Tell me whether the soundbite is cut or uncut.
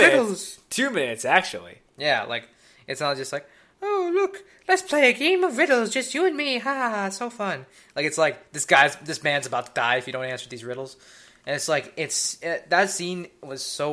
uncut